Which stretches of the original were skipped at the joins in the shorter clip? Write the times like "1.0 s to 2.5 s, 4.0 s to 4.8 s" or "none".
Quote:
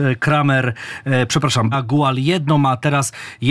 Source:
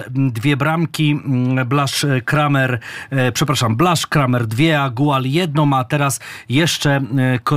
3.8 s to 4.8 s